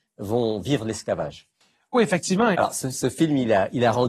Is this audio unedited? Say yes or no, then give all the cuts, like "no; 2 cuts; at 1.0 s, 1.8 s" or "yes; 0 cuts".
no; 1 cut; at 2.5 s